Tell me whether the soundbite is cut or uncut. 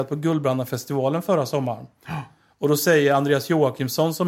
uncut